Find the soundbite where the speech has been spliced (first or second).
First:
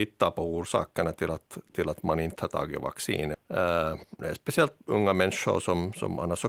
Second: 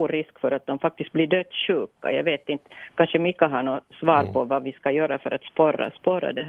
first